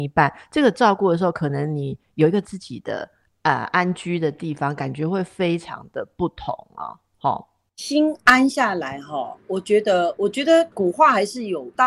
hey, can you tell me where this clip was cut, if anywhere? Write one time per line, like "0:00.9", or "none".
none